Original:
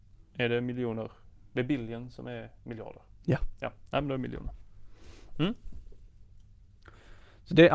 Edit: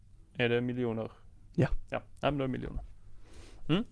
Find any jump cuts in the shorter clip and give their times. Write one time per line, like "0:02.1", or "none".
0:01.5